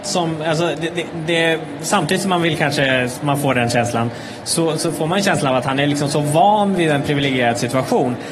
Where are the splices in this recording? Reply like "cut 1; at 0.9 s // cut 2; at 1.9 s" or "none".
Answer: none